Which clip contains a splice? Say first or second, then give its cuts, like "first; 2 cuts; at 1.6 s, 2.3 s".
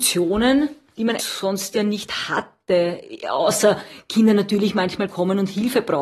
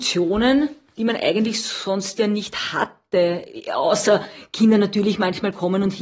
first; 1 cut; at 1.2 s